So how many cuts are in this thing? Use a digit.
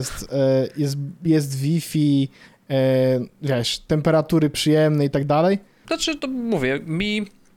1